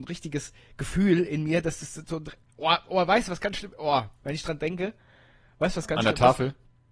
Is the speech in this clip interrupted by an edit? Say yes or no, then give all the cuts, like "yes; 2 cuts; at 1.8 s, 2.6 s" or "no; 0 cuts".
no; 0 cuts